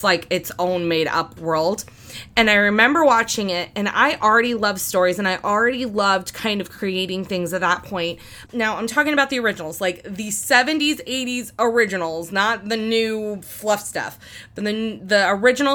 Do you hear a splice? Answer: yes; 1 cut; at 8.5 s

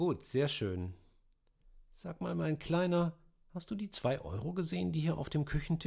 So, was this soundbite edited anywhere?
no; 0 cuts

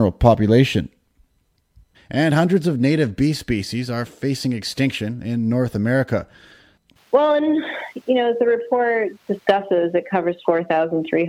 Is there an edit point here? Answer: yes; 2 cuts; at 1.9 s, 7.0 s

